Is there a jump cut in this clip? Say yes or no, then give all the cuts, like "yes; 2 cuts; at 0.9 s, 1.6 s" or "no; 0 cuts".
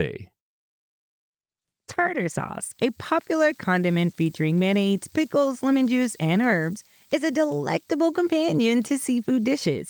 no; 0 cuts